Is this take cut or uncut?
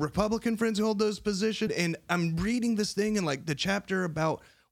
cut